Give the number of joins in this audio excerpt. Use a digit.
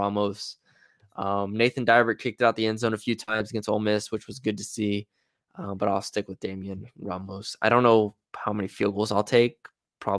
1